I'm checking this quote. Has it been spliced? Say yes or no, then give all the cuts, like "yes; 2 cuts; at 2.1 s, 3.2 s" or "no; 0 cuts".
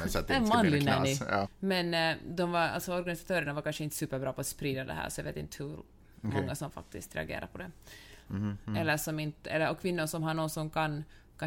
yes; 2 cuts; at 1.4 s, 8.3 s